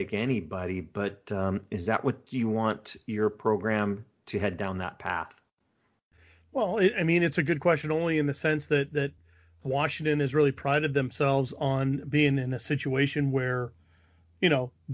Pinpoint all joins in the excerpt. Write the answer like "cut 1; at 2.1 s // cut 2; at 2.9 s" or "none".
none